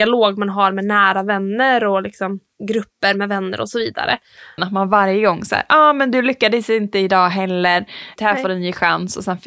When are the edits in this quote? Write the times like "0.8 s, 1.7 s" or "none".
4.6 s, 8.2 s

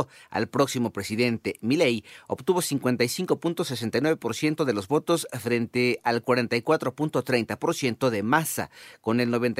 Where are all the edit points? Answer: none

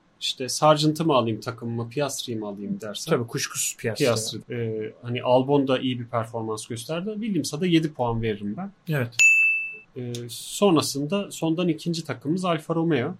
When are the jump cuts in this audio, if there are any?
4.4 s

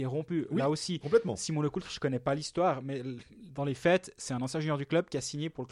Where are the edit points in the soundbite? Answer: none

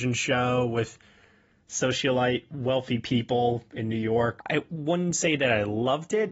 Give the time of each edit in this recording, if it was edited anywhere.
4.4 s

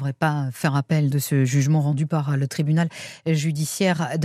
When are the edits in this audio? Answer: 1.1 s

